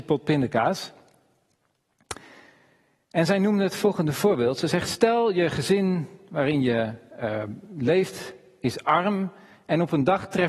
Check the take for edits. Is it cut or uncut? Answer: uncut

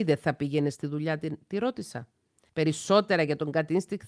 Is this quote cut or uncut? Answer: cut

